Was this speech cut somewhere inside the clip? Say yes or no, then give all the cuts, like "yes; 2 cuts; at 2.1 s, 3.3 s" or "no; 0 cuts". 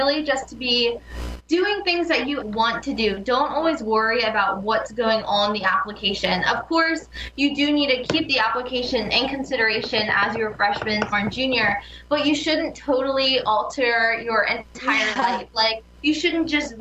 yes; 2 cuts; at 2.4 s, 11.1 s